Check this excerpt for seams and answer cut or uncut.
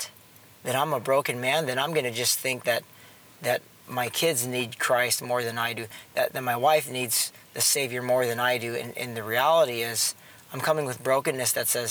uncut